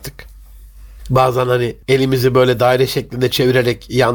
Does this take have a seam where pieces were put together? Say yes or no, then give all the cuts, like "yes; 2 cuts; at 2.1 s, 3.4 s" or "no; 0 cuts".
yes; 1 cut; at 1.8 s